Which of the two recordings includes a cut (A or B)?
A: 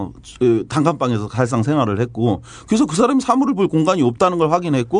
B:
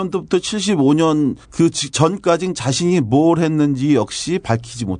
B